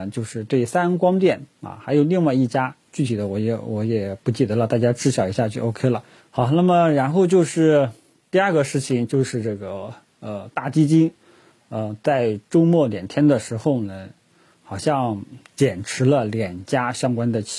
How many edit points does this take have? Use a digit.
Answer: 1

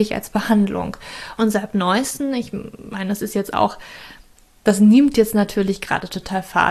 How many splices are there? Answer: 1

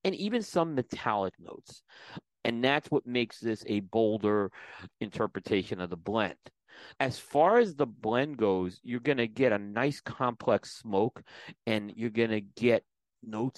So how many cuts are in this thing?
2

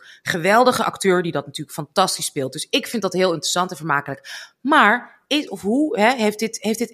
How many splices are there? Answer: 1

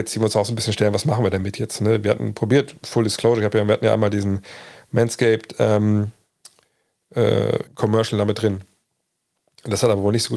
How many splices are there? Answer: 1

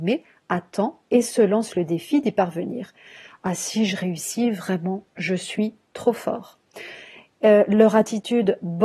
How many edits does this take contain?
0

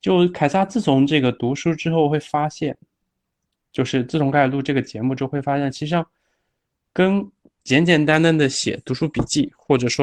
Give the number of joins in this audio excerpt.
0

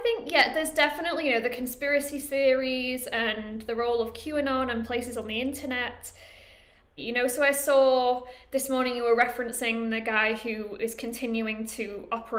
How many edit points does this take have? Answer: 1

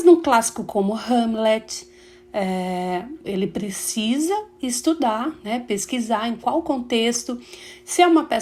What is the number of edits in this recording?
1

